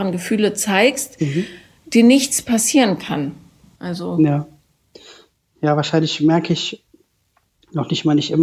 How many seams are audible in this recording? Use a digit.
1